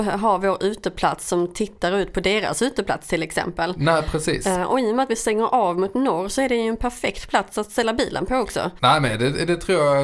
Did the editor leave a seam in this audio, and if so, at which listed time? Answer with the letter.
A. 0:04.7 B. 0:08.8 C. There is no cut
B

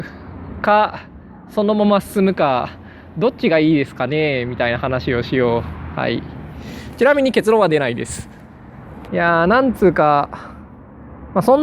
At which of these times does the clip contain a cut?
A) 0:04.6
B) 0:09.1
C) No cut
B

